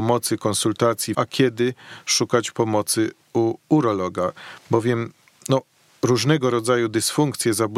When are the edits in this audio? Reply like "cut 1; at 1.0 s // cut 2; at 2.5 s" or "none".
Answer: cut 1; at 1.1 s